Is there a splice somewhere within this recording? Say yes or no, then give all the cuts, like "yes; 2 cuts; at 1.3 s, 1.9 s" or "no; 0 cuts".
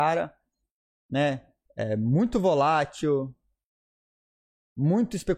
no; 0 cuts